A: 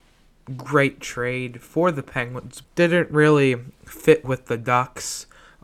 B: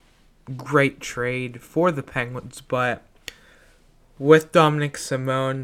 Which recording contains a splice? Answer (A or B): A